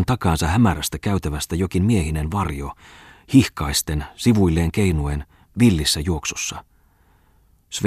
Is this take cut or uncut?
uncut